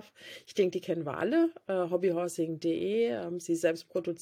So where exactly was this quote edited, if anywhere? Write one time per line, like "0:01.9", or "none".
none

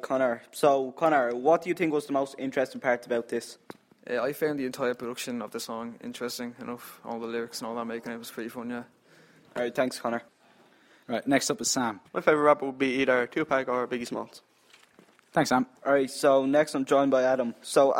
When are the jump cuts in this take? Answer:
0:12.1
0:15.8

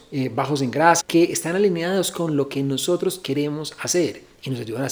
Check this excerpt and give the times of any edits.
0:01.0

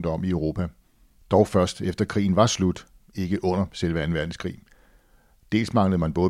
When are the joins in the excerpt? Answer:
none

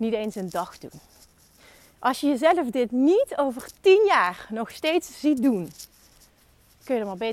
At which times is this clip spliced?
none

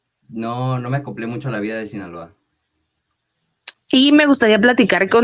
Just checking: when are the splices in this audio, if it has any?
0:03.7

